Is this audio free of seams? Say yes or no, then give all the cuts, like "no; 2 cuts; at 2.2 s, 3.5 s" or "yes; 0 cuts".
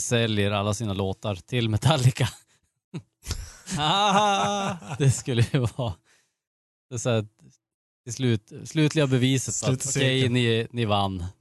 yes; 0 cuts